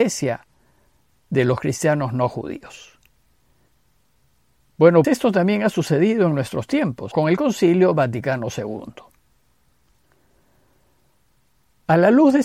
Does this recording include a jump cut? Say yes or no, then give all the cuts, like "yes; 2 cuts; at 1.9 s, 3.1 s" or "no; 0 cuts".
yes; 2 cuts; at 5.0 s, 7.1 s